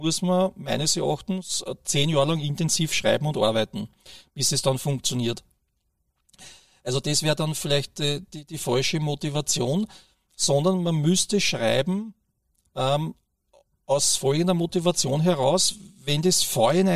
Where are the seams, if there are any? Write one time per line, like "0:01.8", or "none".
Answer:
none